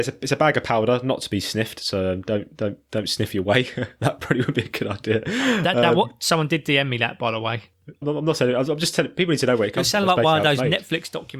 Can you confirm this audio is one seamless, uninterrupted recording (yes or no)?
no